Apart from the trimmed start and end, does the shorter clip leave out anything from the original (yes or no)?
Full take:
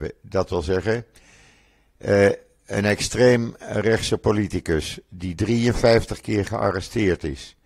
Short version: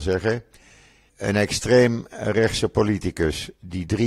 yes